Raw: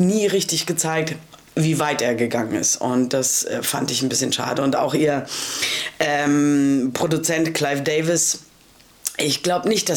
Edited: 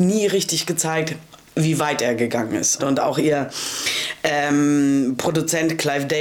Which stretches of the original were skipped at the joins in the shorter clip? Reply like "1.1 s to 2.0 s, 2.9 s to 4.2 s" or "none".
2.8 s to 4.5 s